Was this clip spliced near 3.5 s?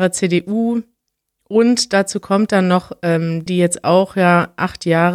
yes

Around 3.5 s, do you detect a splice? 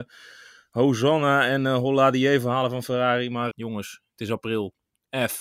yes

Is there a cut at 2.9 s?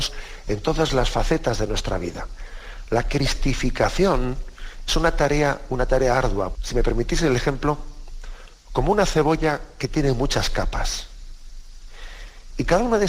no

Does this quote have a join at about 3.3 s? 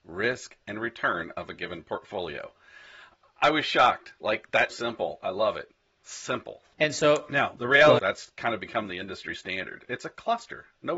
no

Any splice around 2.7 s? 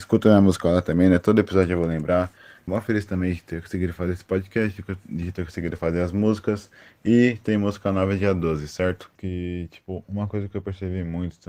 yes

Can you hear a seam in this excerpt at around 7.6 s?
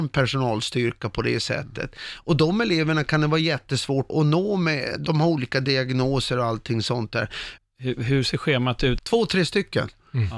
yes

